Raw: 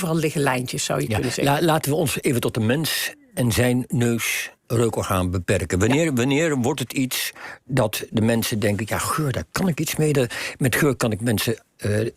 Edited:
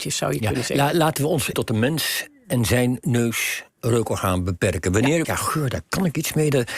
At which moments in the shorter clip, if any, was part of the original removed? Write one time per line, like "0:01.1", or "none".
0:01.5
0:05.2